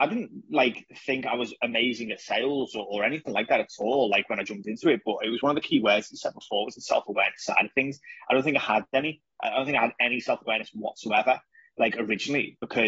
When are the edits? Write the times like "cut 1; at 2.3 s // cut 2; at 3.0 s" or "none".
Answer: none